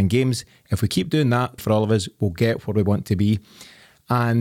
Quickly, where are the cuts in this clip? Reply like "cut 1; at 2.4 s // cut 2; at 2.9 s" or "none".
cut 1; at 1.6 s

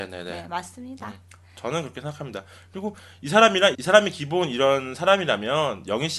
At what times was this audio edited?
cut 1; at 3.7 s

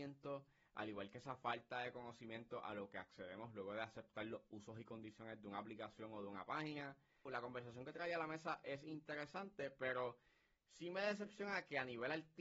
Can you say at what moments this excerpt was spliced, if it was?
cut 1; at 7.3 s

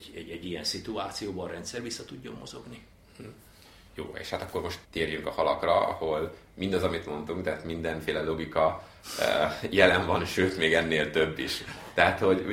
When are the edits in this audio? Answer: cut 1; at 4.8 s

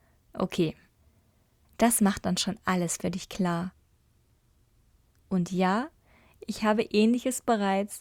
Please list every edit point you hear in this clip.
cut 1; at 1.6 s // cut 2; at 5.1 s

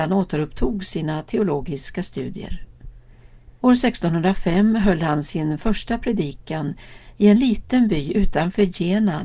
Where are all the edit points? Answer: cut 1; at 3.6 s

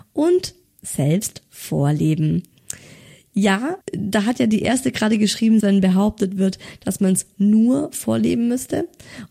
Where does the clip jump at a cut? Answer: cut 1; at 3.8 s // cut 2; at 5.6 s

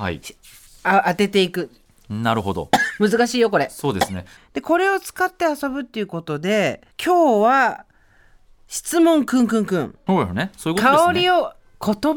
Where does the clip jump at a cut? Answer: cut 1; at 4.4 s // cut 2; at 6.9 s // cut 3; at 10.1 s

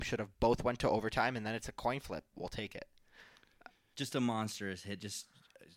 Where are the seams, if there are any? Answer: cut 1; at 2.4 s // cut 2; at 3.9 s

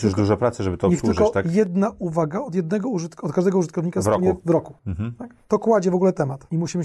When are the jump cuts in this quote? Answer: none

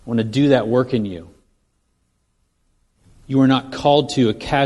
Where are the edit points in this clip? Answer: none

